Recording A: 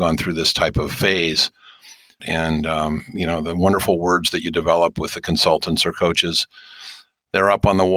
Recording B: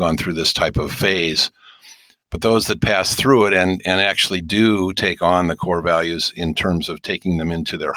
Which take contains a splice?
A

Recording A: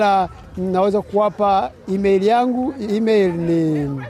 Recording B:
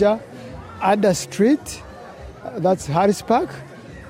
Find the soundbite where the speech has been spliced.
A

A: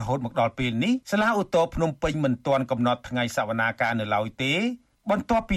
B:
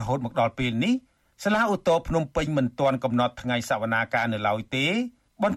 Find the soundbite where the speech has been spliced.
A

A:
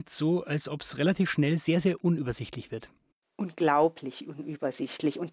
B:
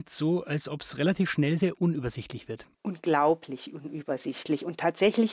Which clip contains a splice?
B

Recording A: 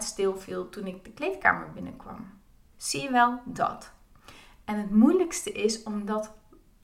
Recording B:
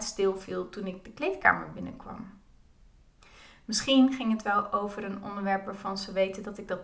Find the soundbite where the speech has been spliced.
A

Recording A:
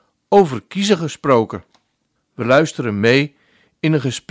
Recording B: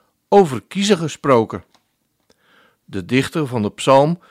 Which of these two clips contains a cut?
A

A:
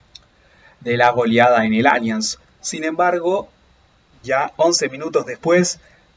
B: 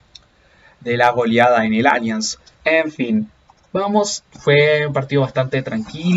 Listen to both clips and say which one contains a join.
B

